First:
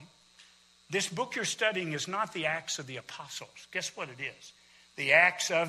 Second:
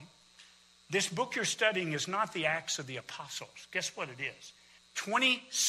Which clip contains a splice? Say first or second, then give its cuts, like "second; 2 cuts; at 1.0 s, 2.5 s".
second; 1 cut; at 4.8 s